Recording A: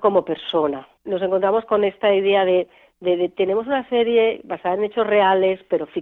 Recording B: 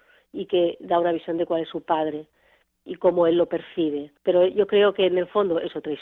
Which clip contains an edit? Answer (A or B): B